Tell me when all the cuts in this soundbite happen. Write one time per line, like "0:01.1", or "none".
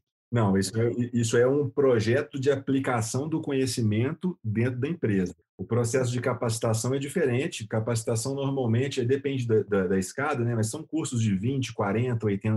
none